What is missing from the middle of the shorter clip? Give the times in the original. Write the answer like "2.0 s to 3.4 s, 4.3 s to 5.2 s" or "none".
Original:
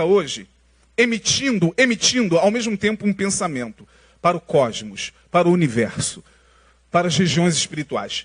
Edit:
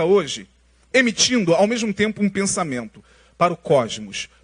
0.9 s to 1.8 s